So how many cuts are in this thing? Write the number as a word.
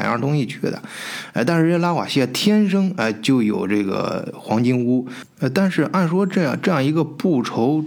one